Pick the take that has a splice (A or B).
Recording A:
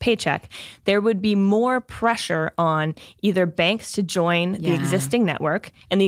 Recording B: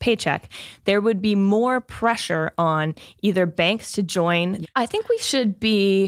B